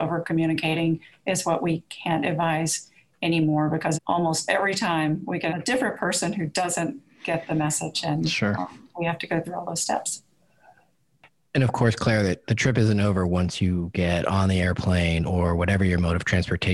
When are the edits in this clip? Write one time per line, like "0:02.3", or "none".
0:03.9
0:05.5